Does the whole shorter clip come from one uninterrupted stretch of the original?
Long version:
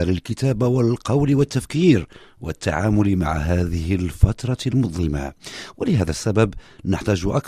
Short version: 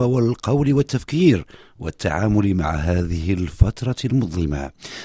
yes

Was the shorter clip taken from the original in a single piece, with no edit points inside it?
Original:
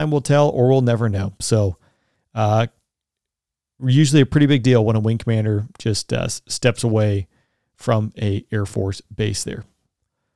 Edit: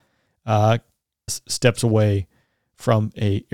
no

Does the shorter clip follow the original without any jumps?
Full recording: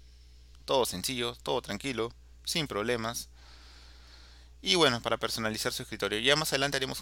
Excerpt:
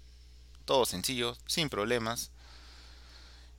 no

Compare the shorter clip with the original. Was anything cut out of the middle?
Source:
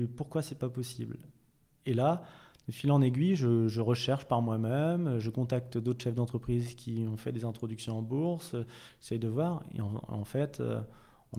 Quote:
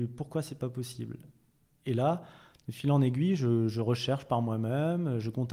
no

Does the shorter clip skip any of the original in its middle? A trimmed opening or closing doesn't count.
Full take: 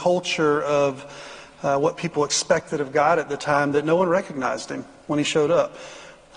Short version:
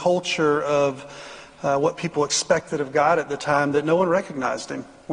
no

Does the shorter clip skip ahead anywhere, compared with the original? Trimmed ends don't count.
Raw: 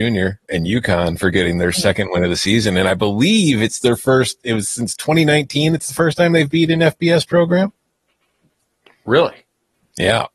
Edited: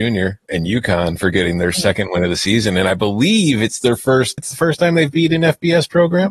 yes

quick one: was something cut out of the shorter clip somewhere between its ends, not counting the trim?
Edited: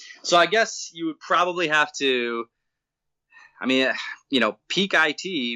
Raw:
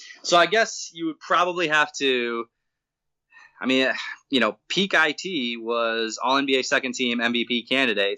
no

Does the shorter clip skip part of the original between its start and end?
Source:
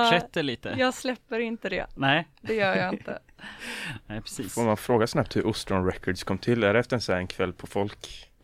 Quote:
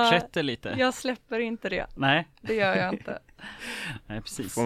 no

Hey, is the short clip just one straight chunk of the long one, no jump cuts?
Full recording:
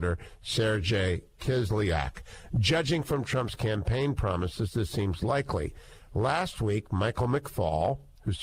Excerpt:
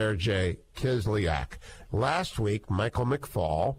no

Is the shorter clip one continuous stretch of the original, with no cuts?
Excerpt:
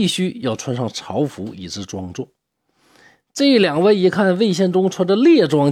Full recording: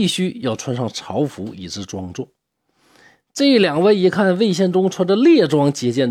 yes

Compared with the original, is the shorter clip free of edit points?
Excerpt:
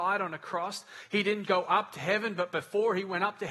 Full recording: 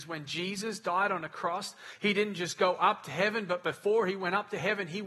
no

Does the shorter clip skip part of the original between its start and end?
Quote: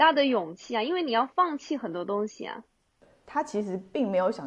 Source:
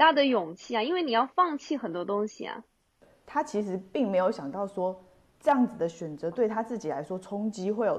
no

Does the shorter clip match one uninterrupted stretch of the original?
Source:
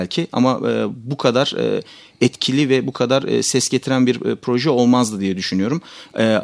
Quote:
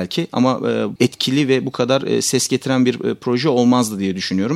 no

